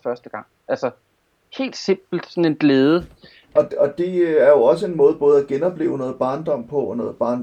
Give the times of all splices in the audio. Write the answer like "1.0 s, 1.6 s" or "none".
3.6 s